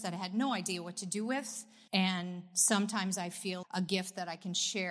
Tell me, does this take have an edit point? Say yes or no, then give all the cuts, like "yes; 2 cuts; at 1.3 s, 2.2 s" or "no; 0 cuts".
yes; 2 cuts; at 1.9 s, 3.6 s